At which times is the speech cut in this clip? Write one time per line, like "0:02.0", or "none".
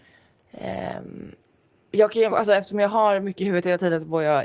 0:02.3

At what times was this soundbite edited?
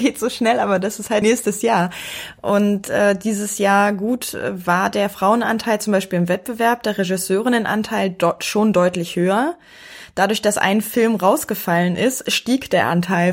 0:01.2

